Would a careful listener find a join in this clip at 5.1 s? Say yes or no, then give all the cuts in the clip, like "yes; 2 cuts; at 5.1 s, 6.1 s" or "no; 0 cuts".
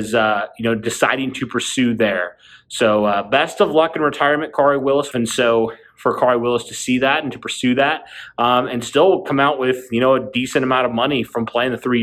yes; 1 cut; at 5.1 s